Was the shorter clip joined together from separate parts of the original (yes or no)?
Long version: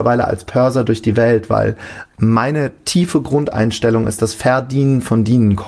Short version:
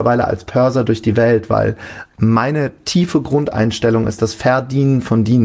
no